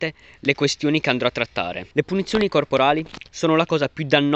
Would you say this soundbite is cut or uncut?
cut